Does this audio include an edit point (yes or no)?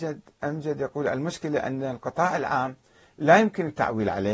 no